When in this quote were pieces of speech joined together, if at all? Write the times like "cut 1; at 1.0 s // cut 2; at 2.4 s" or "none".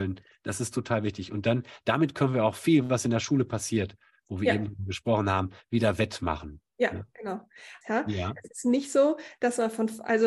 cut 1; at 7.8 s